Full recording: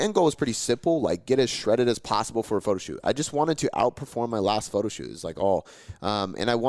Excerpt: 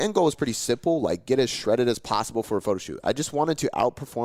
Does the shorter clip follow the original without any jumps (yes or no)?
yes